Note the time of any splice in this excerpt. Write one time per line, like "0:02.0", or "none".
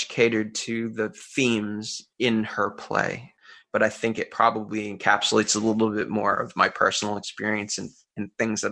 none